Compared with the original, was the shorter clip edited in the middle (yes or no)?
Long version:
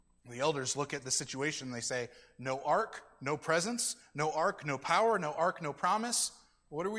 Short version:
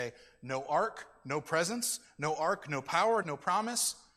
yes